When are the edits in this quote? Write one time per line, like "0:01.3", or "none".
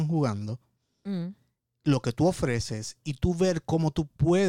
none